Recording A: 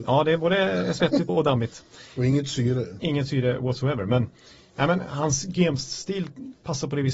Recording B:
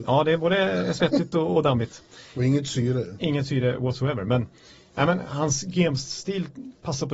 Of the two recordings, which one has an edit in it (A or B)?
A